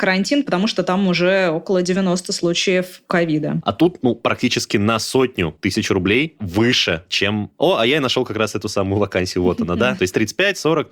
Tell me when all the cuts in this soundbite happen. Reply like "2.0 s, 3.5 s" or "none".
3.6 s, 10.0 s